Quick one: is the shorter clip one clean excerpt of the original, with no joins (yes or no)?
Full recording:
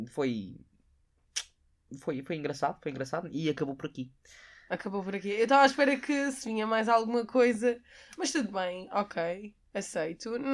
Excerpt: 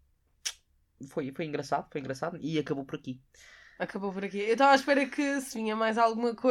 yes